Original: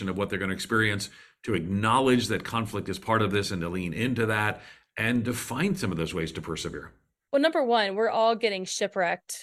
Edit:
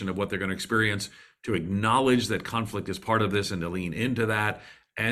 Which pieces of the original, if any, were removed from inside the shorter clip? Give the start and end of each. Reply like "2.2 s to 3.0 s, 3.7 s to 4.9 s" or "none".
none